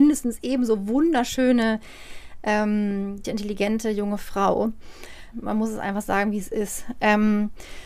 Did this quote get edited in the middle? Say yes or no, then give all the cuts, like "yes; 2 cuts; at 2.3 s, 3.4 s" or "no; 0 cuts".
yes; 2 cuts; at 3.2 s, 5.3 s